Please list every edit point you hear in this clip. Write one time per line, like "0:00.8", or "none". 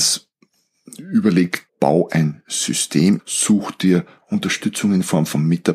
0:01.7
0:03.2